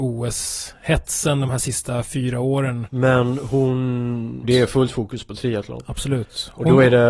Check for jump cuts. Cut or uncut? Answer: cut